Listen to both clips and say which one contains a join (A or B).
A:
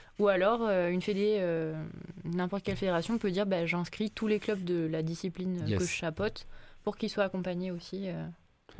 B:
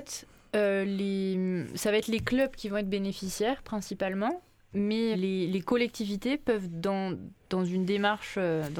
B